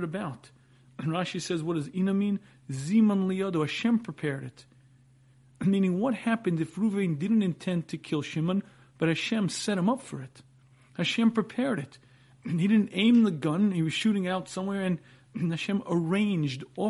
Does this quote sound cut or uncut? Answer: uncut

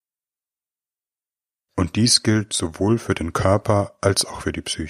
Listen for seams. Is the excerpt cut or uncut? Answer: cut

